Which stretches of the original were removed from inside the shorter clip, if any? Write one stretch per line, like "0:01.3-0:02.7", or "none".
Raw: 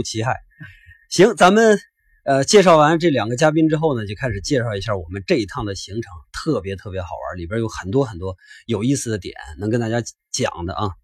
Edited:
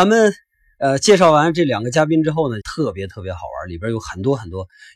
0:04.1-0:06.3

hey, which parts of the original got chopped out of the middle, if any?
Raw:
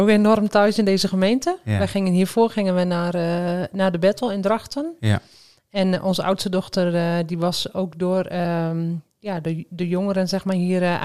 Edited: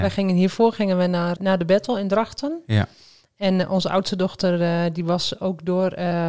0:03.1-0:03.7

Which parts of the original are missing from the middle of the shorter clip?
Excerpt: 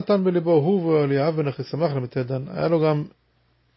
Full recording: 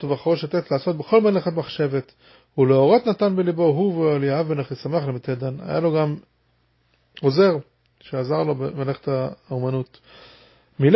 none

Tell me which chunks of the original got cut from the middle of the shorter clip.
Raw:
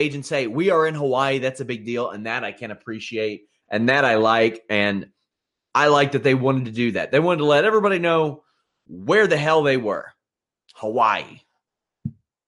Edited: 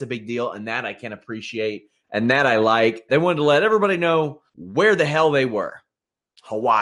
0:04.7-0:07.1
0:08.5-0:08.8

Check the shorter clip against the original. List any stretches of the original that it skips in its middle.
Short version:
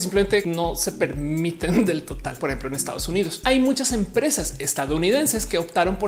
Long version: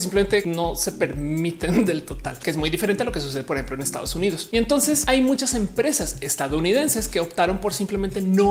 0:02.4-0:03.5
0:04.5-0:05.1

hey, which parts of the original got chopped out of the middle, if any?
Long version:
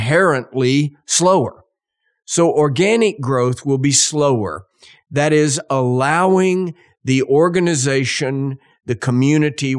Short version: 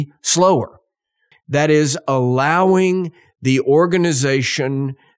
0:02.2-0:04.9

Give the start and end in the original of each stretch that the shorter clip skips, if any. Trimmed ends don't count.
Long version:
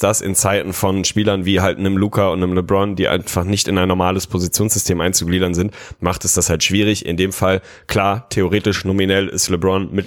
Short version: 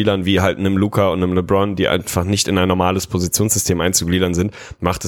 none

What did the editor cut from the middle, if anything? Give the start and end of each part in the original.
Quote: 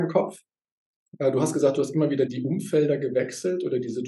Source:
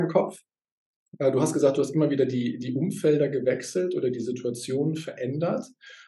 0:02.3-0:02.6

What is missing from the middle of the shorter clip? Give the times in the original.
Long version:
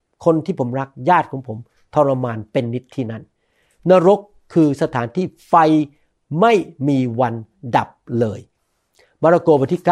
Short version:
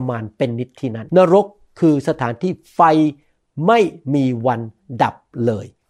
0:03.2-0:03.8

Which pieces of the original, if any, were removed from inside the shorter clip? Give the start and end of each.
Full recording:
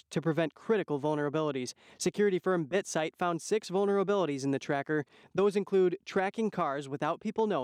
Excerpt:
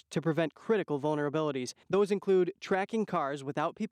0:01.8-0:05.3

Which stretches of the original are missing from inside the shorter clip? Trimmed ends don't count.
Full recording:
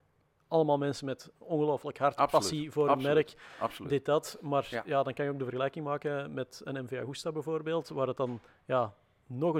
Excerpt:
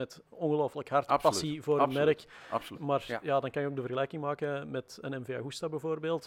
0:03.8-0:04.4

